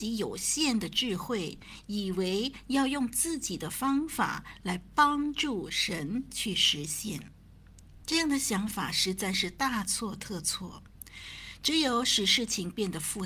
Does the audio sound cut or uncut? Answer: uncut